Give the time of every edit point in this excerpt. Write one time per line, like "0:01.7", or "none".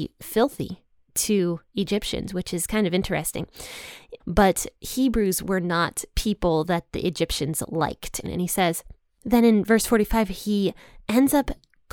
0:04.2
0:08.2